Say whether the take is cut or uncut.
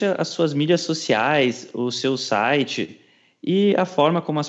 uncut